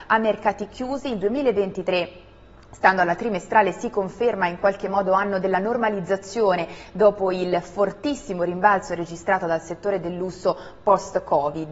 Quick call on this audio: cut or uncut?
uncut